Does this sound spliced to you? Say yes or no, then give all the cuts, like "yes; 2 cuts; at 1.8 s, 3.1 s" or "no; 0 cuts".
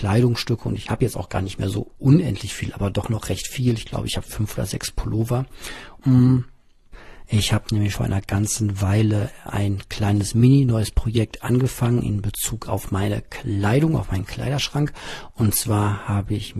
yes; 2 cuts; at 6.0 s, 7.9 s